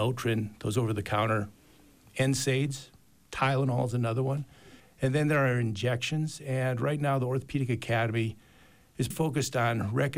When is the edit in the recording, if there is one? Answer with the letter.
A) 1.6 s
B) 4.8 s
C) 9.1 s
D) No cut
C